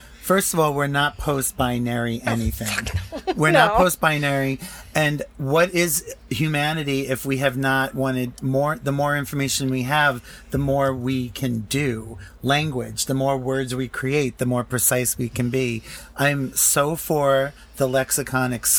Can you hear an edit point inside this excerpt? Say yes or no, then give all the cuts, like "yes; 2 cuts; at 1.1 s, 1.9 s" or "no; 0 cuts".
no; 0 cuts